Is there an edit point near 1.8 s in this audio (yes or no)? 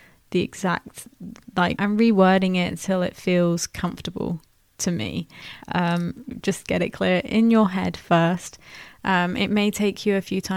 yes